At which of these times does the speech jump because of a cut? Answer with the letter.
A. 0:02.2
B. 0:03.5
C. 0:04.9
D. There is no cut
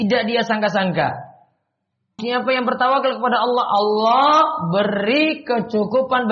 A